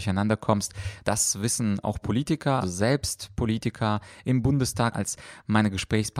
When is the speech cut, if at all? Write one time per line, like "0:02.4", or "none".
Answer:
0:01.0
0:02.6
0:04.9